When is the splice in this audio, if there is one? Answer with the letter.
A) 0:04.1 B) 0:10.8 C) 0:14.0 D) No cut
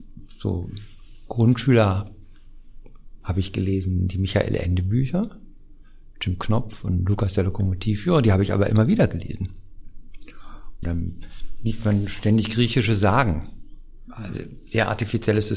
B